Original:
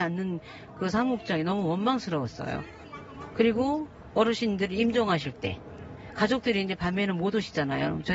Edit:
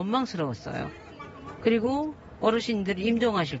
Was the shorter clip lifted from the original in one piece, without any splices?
yes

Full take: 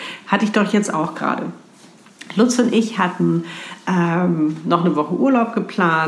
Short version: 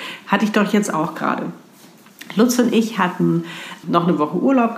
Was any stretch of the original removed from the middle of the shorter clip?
yes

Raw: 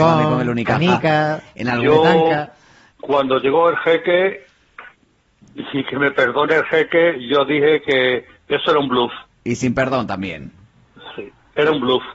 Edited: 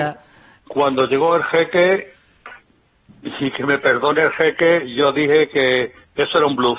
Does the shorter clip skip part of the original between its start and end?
no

